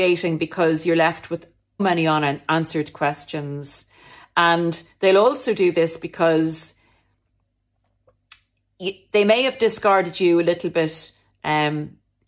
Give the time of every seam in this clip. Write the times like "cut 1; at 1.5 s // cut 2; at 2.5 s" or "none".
cut 1; at 1.8 s